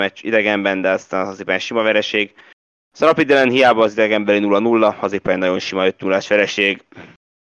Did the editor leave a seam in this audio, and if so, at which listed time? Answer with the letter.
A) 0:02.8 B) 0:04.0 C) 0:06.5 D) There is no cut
A